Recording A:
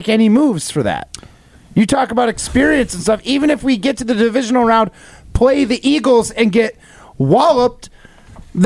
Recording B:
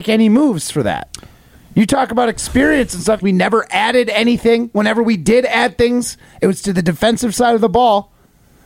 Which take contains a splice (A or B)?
B